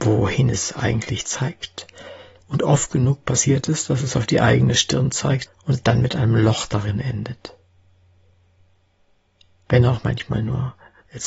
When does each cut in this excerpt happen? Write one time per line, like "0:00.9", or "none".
0:05.5